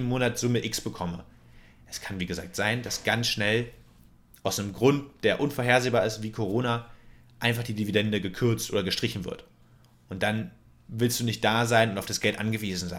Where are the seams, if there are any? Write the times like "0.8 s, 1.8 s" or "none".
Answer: none